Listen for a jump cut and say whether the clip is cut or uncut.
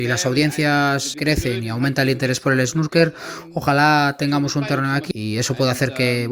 cut